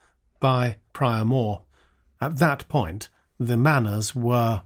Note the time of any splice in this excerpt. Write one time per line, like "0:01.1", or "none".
0:02.2